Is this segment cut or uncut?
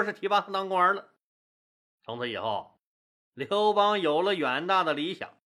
cut